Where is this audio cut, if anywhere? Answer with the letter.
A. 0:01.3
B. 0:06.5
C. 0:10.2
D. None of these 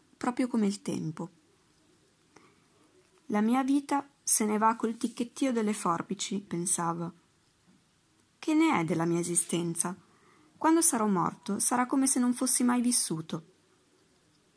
B